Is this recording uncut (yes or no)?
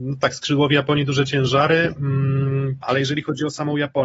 no